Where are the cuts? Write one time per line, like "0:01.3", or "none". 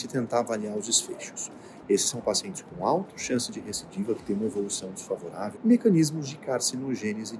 0:01.8
0:05.5